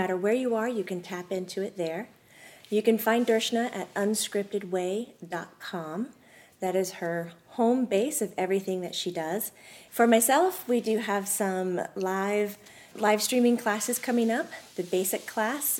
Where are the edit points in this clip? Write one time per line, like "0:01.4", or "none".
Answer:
0:09.9
0:12.9